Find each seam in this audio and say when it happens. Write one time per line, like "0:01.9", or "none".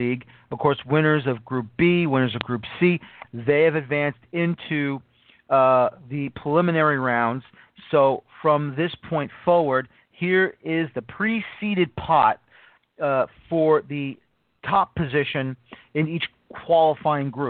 0:03.2